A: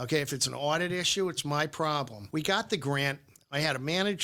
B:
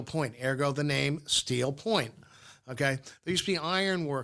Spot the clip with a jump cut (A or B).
A